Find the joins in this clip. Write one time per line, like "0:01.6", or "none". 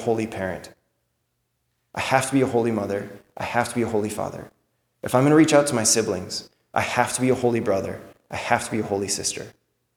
none